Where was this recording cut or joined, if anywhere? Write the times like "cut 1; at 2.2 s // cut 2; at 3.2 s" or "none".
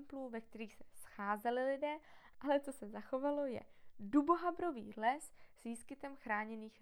cut 1; at 2.3 s